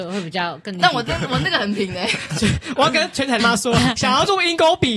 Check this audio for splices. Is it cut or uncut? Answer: cut